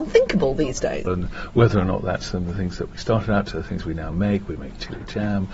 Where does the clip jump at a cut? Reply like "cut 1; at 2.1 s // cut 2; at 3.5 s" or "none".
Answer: cut 1; at 1.1 s // cut 2; at 4.5 s